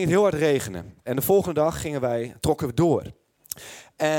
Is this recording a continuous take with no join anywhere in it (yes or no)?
yes